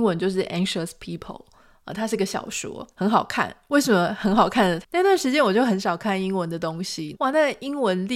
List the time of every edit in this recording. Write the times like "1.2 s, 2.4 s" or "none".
4.8 s, 7.1 s